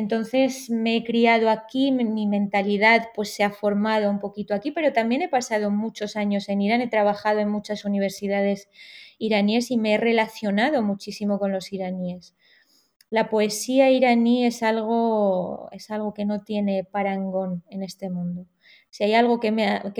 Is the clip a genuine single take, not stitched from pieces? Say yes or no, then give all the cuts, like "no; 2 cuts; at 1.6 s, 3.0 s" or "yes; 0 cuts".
yes; 0 cuts